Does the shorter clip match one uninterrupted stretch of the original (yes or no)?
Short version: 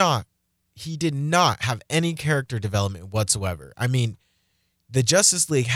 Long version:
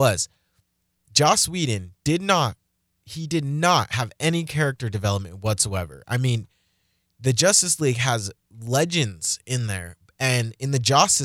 yes